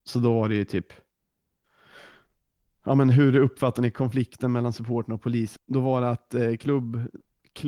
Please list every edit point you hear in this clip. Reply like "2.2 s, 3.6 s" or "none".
5.6 s